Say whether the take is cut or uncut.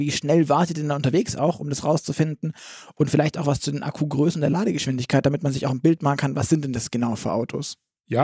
uncut